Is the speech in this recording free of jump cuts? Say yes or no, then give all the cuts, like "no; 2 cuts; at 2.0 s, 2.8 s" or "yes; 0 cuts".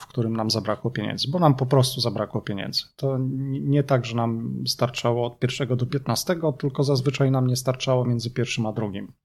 yes; 0 cuts